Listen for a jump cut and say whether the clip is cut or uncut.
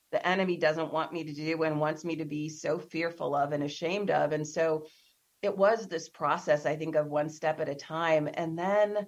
uncut